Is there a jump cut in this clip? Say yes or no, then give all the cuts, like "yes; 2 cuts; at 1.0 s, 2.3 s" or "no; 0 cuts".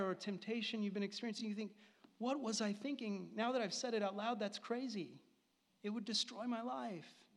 no; 0 cuts